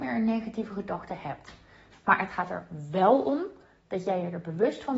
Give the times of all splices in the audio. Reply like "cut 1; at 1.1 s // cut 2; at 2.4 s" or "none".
cut 1; at 1.9 s